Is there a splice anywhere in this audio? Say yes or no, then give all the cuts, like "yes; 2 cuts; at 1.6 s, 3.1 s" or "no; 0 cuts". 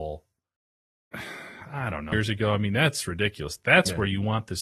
yes; 1 cut; at 2.1 s